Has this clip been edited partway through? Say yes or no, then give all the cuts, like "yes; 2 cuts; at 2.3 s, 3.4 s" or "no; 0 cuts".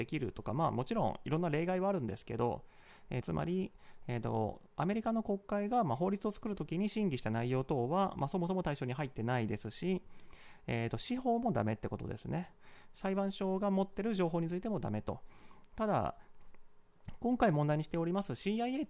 yes; 1 cut; at 3.2 s